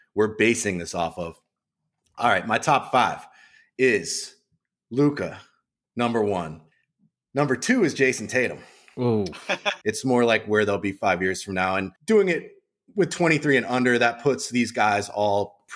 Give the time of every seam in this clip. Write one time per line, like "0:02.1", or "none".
0:09.8
0:12.0